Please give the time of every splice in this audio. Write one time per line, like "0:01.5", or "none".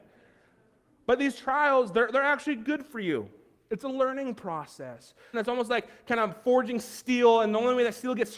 0:05.3